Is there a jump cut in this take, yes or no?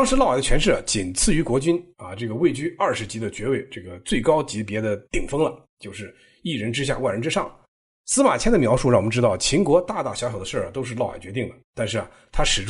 no